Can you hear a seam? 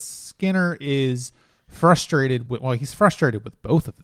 yes; 1 cut; at 2.5 s

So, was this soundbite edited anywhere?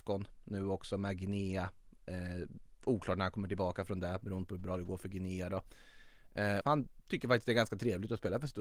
yes; 1 cut; at 6.6 s

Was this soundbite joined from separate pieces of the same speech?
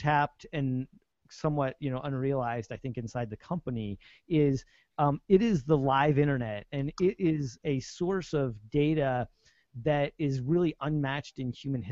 no; 0 cuts

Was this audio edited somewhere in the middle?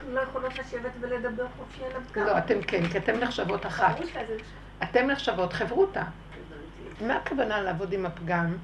yes; 1 cut; at 7.0 s

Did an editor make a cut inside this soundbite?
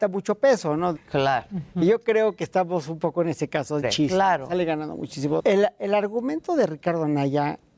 yes; 3 cuts; at 1.0 s, 3.8 s, 5.4 s

